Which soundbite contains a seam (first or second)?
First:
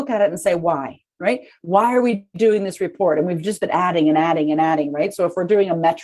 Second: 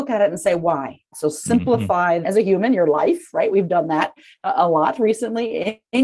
second